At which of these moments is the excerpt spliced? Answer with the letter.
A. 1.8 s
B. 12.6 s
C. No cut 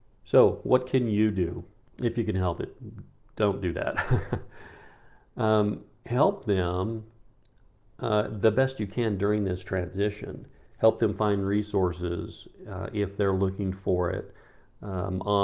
A